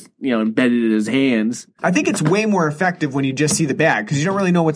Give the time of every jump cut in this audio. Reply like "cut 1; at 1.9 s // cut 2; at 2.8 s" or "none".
cut 1; at 1.8 s